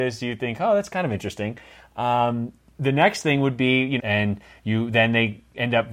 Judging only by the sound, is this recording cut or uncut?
cut